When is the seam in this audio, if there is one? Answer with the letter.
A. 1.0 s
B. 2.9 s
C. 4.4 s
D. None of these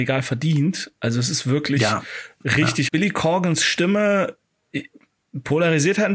B